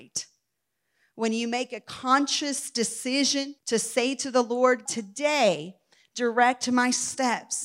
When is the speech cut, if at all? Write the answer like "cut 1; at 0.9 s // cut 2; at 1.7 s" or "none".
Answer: cut 1; at 3.6 s // cut 2; at 4.9 s